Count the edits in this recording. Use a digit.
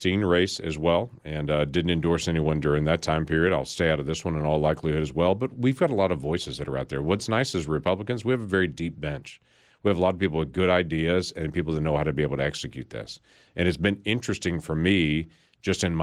0